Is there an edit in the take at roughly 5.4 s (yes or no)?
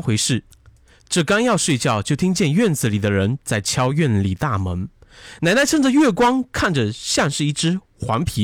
yes